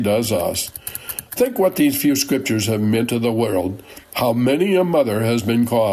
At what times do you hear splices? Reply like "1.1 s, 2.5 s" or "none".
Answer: none